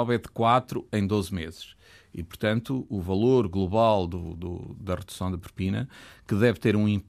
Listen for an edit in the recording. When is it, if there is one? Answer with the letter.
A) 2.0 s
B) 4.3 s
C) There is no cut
C